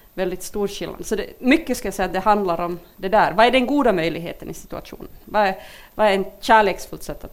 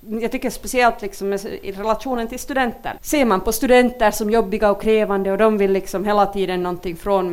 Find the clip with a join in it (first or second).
second